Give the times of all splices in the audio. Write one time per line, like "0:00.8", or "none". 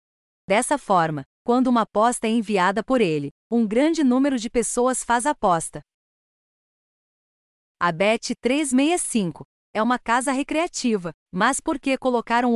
0:09.6
0:11.2